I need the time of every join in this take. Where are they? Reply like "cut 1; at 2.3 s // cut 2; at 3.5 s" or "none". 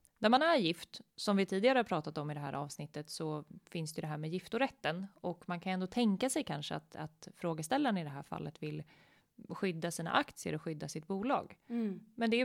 none